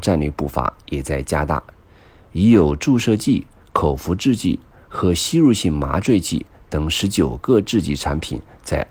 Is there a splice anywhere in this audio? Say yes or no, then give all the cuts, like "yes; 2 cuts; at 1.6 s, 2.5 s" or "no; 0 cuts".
no; 0 cuts